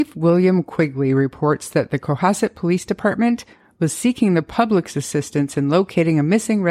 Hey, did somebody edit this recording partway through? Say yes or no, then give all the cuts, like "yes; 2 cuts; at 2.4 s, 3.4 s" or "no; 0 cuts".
no; 0 cuts